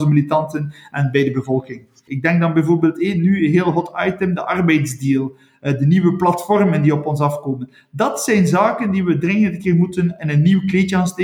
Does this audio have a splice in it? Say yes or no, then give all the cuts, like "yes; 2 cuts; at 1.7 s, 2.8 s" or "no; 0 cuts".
yes; 1 cut; at 2.1 s